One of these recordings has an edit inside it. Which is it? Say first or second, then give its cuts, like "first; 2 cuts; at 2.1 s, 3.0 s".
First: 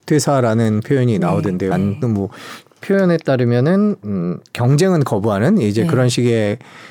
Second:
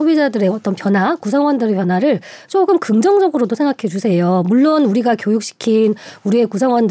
first; 1 cut; at 1.7 s